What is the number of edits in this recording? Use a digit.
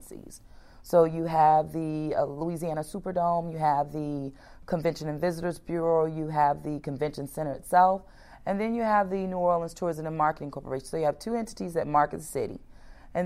0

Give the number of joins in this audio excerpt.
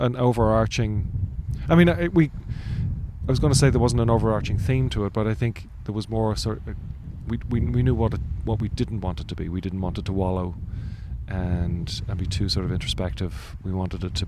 0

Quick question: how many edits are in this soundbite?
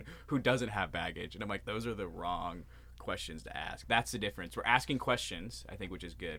1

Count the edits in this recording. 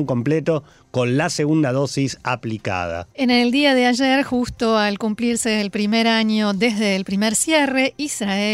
1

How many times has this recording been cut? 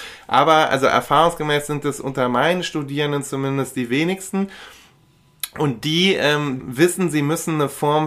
1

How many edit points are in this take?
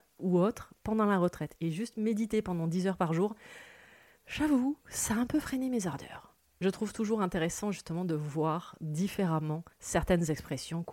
2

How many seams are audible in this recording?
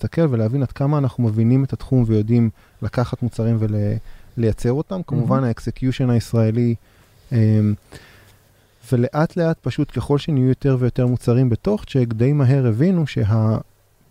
0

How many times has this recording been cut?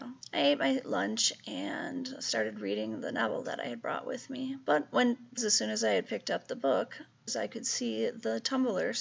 2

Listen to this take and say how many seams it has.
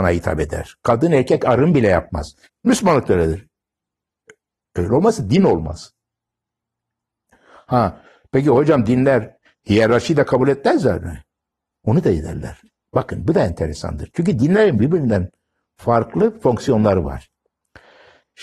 1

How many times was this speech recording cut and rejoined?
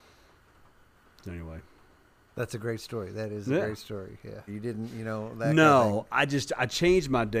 1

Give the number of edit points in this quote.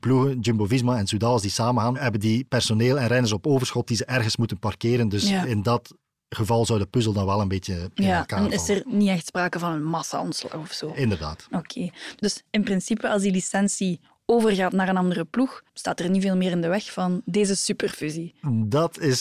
1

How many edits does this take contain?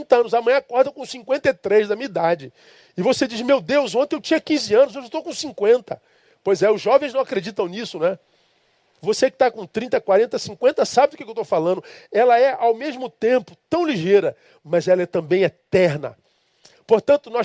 1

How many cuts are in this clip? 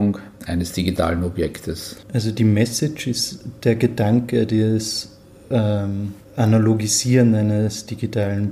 2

